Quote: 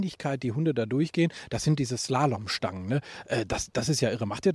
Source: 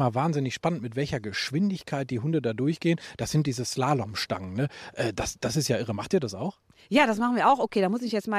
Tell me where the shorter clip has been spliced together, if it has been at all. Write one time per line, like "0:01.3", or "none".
none